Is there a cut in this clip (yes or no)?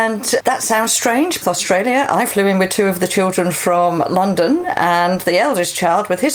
yes